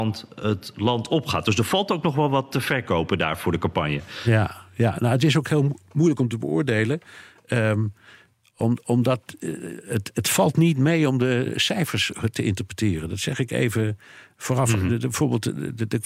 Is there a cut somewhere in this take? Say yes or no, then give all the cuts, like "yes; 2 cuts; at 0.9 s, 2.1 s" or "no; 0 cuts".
no; 0 cuts